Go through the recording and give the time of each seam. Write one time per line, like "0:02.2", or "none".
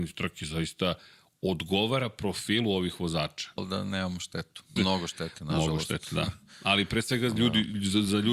0:03.6
0:04.8